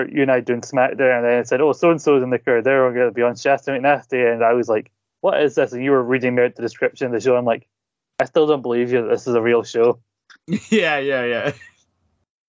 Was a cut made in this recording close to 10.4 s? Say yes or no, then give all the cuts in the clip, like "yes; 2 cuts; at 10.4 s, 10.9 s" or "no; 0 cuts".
no; 0 cuts